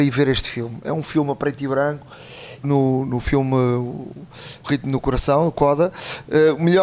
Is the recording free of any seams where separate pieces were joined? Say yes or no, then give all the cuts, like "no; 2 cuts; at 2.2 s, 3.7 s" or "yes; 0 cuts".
no; 2 cuts; at 2.6 s, 4.6 s